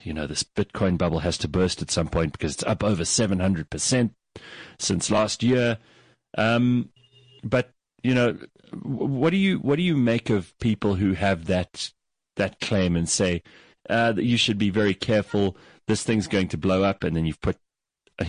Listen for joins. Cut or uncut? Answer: uncut